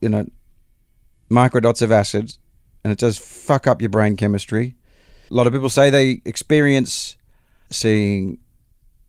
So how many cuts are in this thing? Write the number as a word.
two